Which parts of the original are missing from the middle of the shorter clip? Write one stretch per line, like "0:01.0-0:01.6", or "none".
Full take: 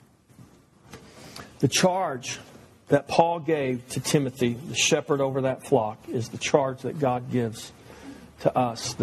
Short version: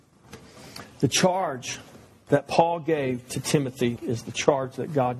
0:04.6-0:06.0